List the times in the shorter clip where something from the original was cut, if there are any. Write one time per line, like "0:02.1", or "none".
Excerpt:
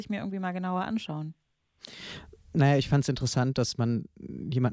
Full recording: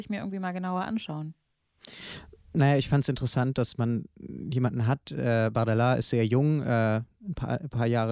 none